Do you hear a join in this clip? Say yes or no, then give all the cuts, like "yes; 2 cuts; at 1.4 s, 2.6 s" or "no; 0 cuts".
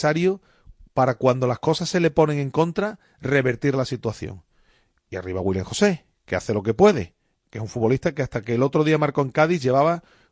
no; 0 cuts